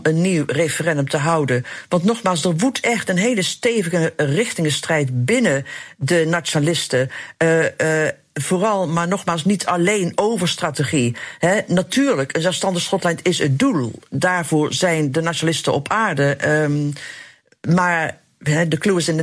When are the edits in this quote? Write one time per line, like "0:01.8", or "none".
none